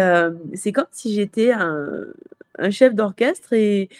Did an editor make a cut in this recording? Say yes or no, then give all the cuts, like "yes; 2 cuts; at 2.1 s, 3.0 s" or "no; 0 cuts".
no; 0 cuts